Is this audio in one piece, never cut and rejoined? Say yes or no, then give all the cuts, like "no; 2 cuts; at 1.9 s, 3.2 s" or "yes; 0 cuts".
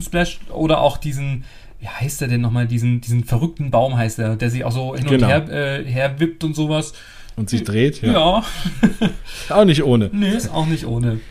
yes; 0 cuts